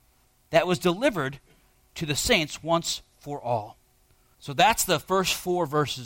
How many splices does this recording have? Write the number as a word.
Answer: one